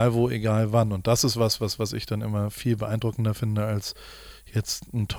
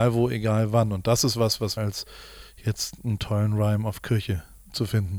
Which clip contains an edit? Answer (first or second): second